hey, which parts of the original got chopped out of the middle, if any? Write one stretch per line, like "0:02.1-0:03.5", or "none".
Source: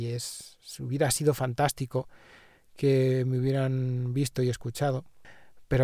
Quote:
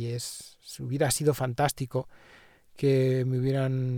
none